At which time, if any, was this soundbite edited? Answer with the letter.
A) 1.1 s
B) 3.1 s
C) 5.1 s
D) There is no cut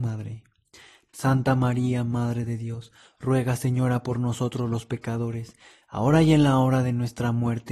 A